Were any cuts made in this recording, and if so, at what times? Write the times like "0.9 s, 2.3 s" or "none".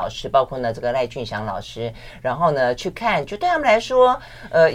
none